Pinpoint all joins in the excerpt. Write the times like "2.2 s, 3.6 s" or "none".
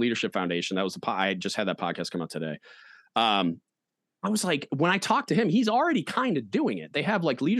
none